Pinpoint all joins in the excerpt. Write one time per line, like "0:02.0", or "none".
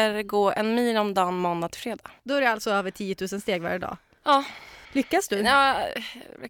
0:04.8